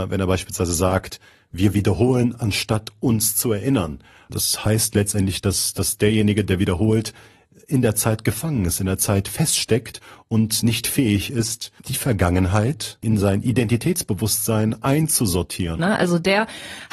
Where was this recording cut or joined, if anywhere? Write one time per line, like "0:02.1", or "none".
0:11.8
0:15.8

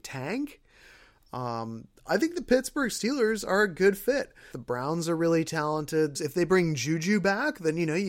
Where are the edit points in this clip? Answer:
0:04.5
0:06.1

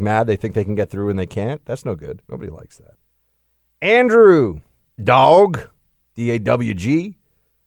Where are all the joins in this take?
0:02.2
0:05.0

